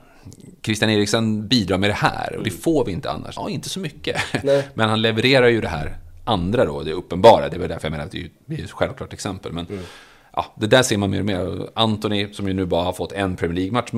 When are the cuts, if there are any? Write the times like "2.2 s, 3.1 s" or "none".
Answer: 3.4 s